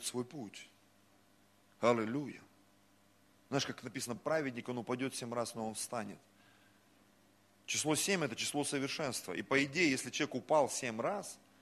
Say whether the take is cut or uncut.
uncut